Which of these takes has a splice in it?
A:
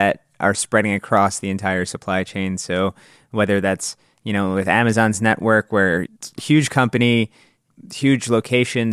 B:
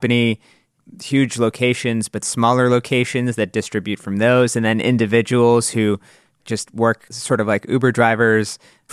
B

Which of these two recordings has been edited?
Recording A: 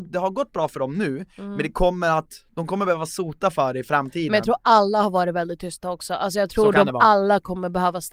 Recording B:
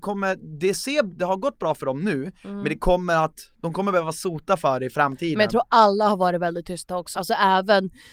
B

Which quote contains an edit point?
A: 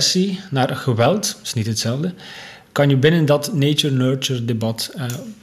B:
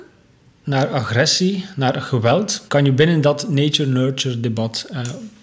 B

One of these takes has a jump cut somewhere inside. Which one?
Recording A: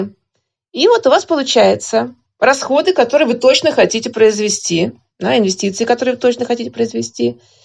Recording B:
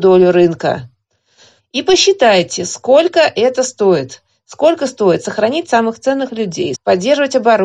B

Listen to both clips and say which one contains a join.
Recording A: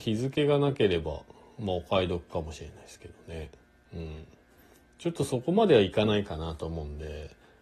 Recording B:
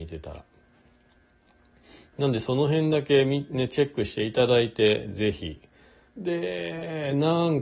B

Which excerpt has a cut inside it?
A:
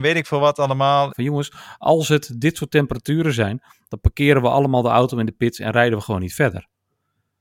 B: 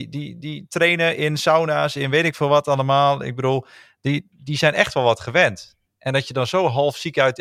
A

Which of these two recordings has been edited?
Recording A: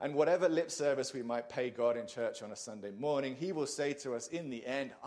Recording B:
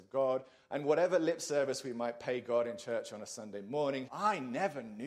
B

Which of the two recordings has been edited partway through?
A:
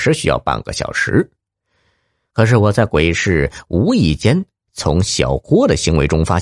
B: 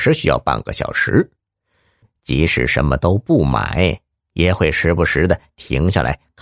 B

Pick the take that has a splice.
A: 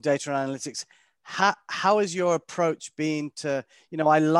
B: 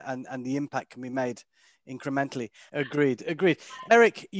B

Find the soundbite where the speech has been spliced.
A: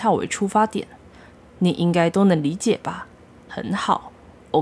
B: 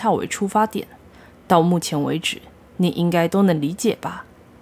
A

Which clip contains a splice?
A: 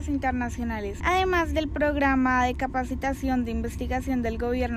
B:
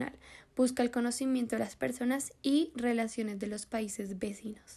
A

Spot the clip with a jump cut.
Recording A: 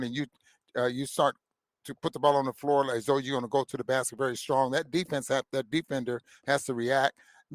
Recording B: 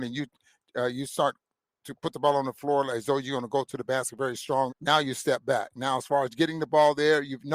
B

